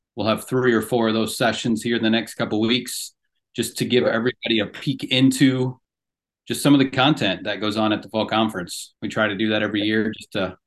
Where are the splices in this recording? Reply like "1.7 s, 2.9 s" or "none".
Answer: none

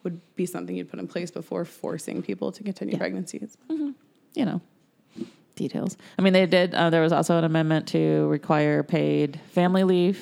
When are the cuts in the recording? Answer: none

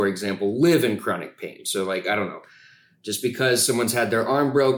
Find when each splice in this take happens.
none

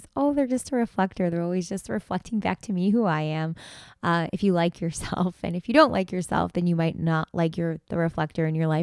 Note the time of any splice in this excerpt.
none

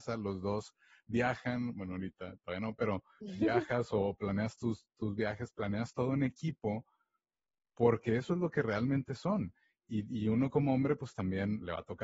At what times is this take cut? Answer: none

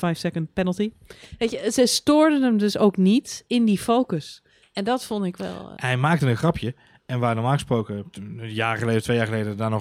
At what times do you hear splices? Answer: 5.8 s

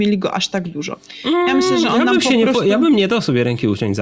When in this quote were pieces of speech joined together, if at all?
none

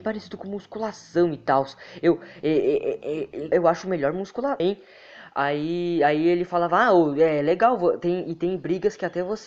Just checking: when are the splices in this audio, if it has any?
3.5 s, 4.6 s

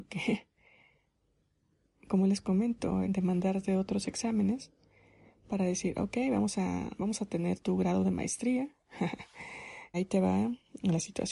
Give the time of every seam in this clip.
3.0 s, 9.9 s

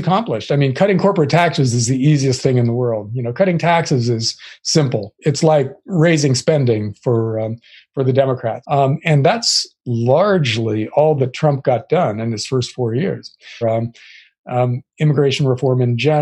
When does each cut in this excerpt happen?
8.6 s, 13.6 s

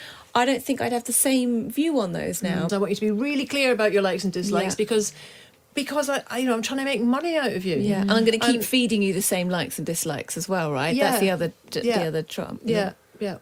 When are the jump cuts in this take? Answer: 2.7 s

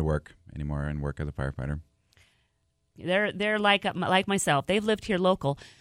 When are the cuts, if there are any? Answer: 2.9 s

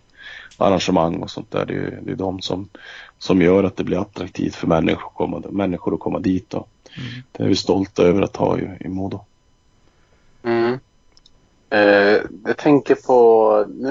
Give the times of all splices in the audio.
none

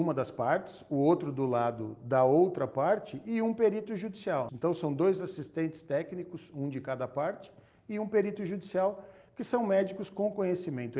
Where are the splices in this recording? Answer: 4.5 s

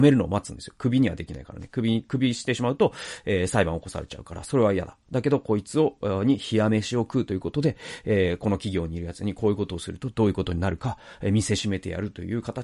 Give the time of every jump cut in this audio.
none

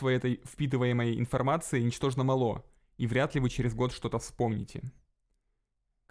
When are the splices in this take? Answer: none

